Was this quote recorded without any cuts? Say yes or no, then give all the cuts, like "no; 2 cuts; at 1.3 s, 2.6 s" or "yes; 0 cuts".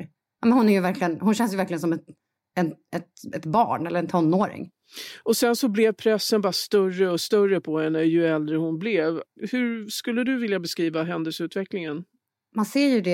yes; 0 cuts